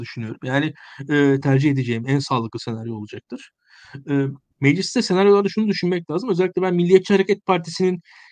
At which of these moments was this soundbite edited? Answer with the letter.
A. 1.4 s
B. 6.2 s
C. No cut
A